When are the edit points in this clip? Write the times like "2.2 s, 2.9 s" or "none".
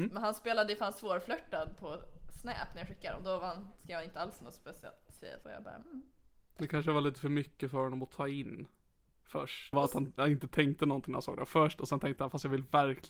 5.4 s, 9.7 s